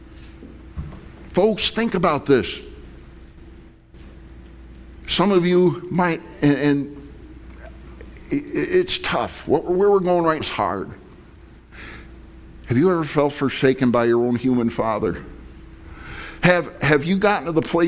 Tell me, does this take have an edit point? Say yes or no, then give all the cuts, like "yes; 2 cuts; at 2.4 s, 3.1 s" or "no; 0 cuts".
yes; 1 cut; at 10.4 s